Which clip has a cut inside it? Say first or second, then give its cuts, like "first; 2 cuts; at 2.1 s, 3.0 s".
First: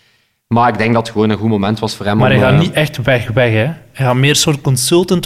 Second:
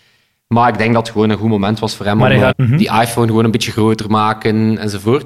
second; 1 cut; at 2.5 s